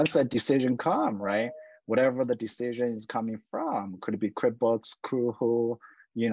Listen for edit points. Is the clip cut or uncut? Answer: uncut